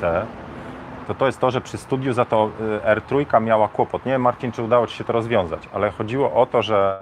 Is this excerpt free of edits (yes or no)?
no